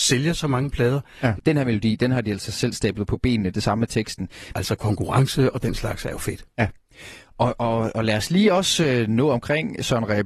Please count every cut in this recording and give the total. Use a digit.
2